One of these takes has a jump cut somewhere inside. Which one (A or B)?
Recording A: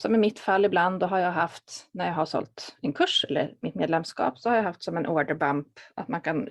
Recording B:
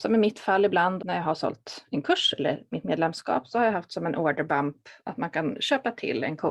B